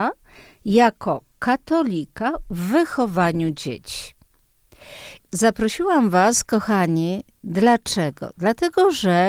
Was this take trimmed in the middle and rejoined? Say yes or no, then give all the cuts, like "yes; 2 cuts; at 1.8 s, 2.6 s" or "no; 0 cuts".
yes; 1 cut; at 5.2 s